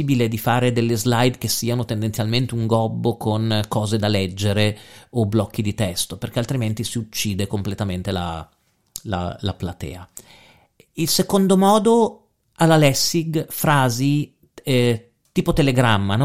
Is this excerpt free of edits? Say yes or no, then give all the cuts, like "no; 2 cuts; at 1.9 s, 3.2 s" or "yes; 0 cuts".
yes; 0 cuts